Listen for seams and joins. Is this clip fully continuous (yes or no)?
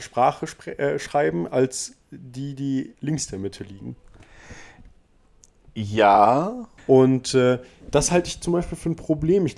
no